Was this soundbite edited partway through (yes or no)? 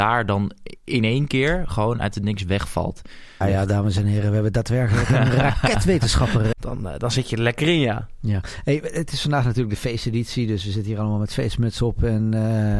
yes